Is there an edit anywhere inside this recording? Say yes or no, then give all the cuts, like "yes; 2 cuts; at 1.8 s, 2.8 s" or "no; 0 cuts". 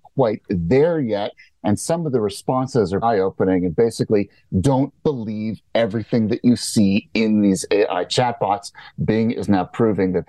yes; 1 cut; at 3.0 s